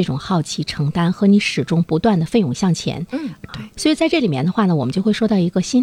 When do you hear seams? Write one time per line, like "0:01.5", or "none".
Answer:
0:03.5